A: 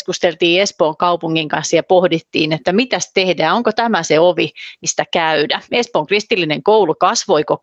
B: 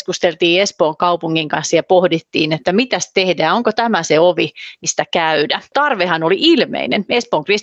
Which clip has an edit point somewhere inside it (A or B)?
A